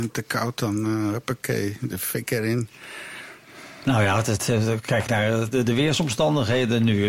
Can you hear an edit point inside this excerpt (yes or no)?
no